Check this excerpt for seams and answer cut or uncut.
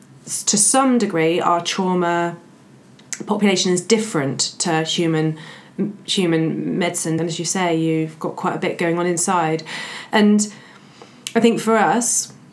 cut